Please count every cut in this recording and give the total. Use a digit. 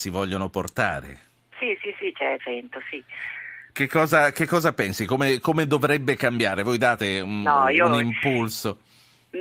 1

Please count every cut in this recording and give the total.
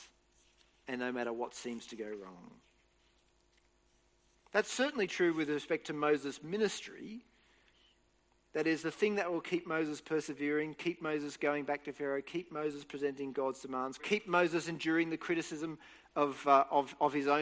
1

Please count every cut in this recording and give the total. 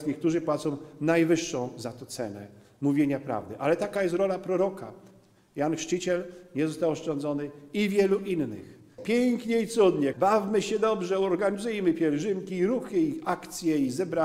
2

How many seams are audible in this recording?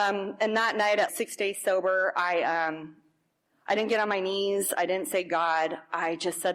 1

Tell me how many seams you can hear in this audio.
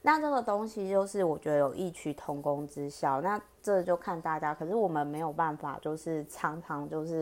0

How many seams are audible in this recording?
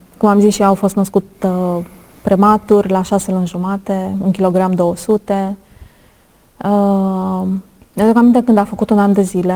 1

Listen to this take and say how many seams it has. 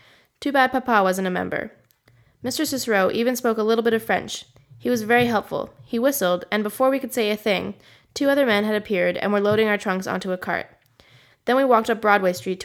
0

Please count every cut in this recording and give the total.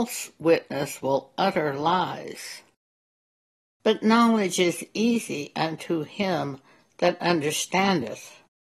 1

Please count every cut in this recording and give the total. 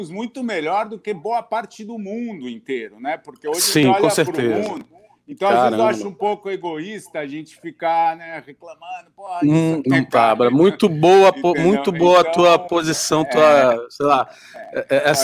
1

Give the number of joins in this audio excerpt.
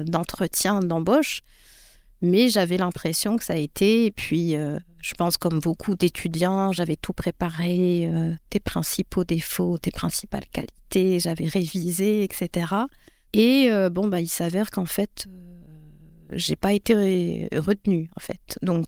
0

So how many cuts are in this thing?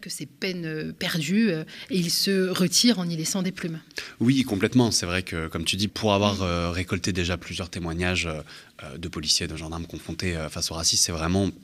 1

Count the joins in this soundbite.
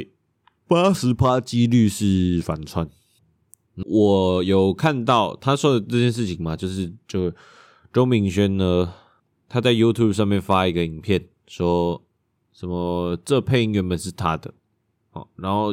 1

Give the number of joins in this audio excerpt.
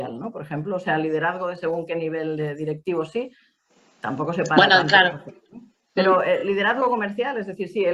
0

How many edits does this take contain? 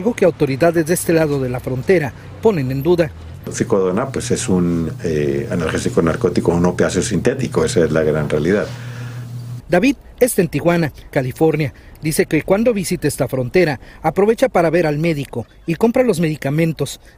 2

